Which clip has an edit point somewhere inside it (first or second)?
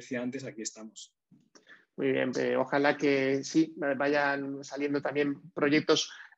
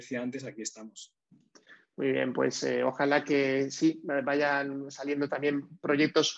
first